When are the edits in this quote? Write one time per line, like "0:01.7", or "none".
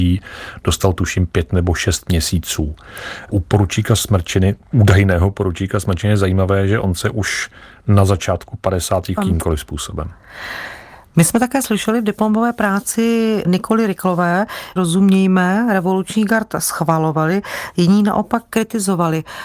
0:09.2
0:11.0
0:14.8